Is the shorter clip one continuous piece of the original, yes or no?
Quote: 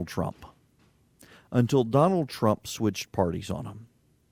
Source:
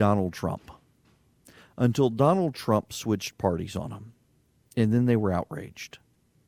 yes